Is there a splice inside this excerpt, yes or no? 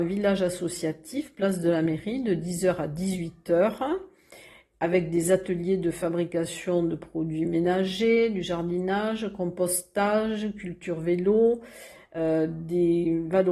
no